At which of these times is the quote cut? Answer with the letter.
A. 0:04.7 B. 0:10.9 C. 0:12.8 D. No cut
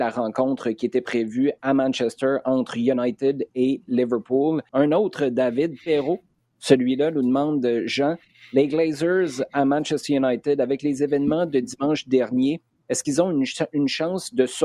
A